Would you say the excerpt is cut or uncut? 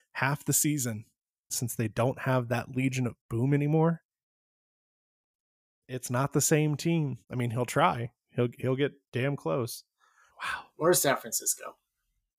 cut